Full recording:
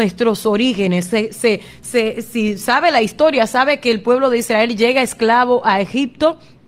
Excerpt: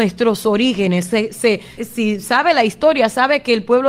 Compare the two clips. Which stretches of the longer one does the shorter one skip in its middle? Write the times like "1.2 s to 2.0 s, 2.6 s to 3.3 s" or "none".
1.8 s to 2.1 s